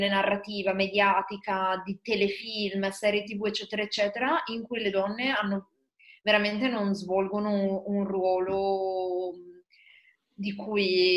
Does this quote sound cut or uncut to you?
uncut